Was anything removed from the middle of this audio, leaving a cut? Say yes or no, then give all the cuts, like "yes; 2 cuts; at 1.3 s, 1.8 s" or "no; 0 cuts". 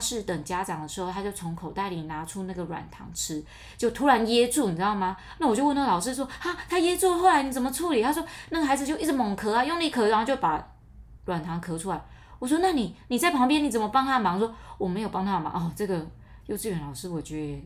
no; 0 cuts